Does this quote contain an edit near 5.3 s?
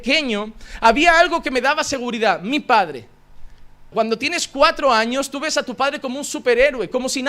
no; 1 cut; at 3.9 s

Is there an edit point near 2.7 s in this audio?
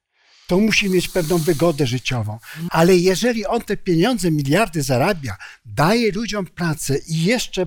yes; 1 cut; at 2.7 s

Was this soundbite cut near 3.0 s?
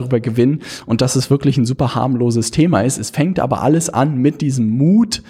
no; 0 cuts

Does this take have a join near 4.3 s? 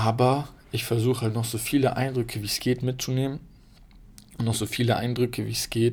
no; 0 cuts

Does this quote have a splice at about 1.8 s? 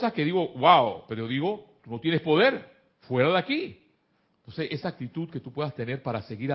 yes; 2 cuts; at 1.8 s, 4.3 s

